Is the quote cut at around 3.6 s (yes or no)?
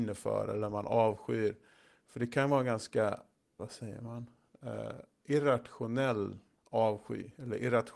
yes